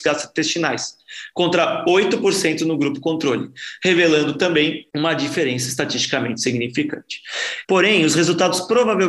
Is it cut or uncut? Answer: cut